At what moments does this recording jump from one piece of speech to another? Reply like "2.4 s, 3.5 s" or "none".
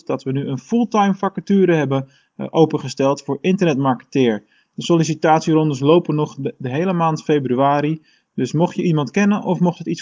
none